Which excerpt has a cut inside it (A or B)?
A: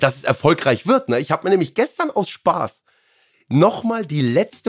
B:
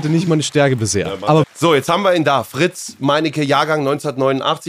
B